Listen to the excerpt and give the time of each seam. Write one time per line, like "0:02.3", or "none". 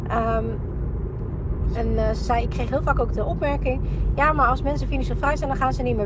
0:01.7
0:03.1